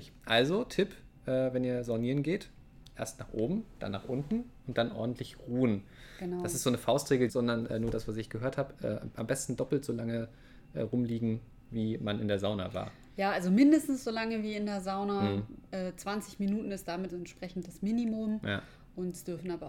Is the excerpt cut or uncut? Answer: cut